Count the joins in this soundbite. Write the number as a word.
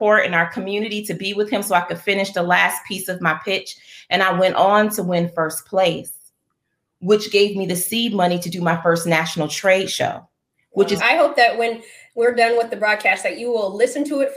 one